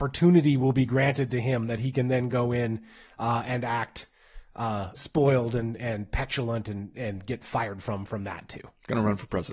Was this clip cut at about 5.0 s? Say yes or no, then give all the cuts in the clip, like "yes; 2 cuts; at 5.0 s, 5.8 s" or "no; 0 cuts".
yes; 1 cut; at 5.0 s